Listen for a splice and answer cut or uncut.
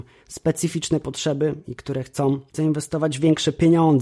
uncut